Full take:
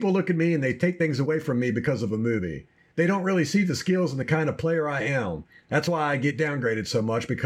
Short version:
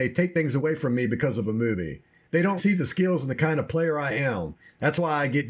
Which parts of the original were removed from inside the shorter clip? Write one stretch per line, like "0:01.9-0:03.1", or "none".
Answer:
0:03.2-0:03.5